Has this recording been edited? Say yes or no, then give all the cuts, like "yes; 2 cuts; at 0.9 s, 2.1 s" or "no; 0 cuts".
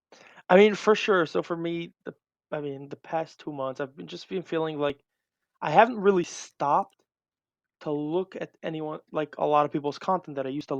no; 0 cuts